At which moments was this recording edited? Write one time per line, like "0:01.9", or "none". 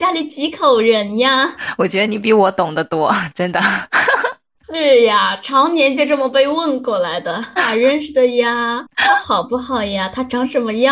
0:07.6